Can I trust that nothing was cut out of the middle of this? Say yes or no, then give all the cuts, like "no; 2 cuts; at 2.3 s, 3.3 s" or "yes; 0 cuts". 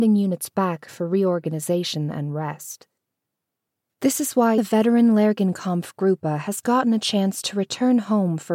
no; 1 cut; at 4.6 s